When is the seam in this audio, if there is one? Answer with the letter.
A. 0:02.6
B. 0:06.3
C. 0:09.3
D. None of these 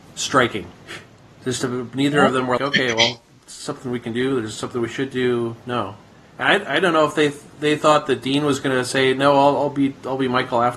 A